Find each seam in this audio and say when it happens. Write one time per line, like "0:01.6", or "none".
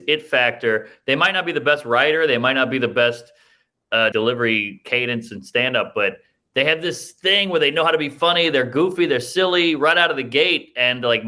0:04.1

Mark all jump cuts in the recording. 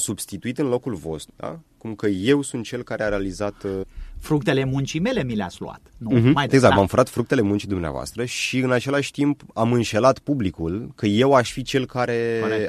0:01.3
0:03.8
0:06.5

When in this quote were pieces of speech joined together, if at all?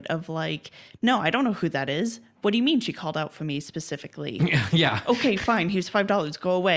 none

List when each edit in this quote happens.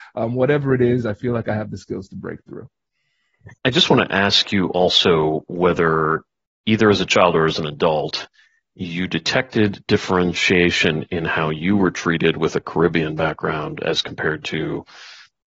0:03.6

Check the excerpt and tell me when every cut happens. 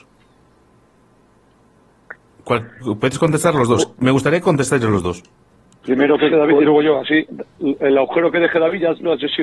0:02.8
0:06.3

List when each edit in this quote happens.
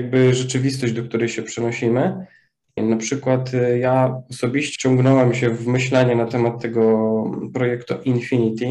0:02.8
0:04.8

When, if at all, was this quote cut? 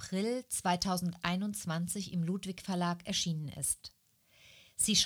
none

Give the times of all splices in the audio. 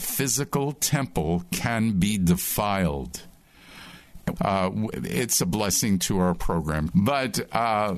0:04.4
0:06.9

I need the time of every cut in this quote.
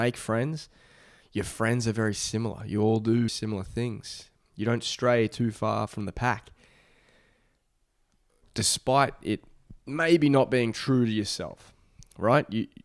0:03.3

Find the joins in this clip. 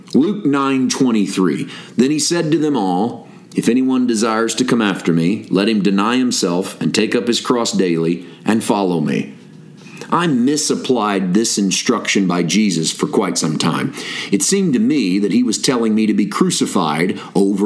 none

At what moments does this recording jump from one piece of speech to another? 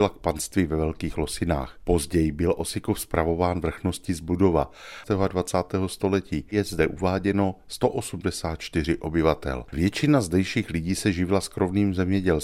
0:05.0
0:09.7

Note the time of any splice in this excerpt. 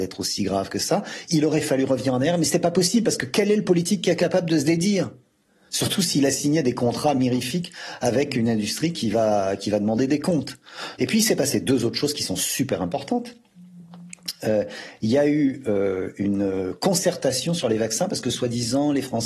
0:11.0

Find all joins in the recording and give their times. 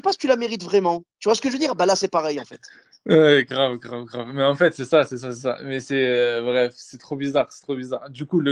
none

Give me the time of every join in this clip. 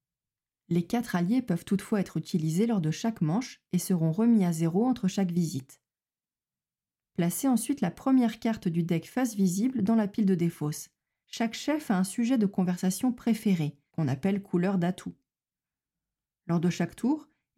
0:11.2
0:13.9

